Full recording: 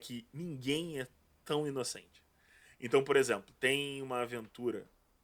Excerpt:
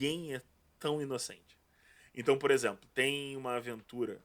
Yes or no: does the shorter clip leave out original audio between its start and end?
no